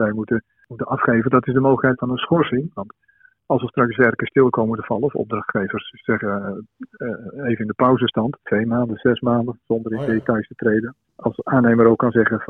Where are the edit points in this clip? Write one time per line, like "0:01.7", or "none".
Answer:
0:08.4